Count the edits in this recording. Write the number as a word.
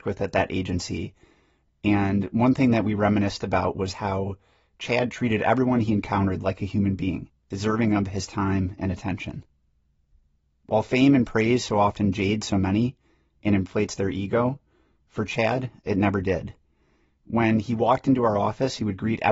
zero